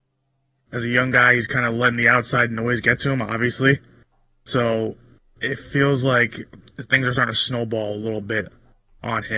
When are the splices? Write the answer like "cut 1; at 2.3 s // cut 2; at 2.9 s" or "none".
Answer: none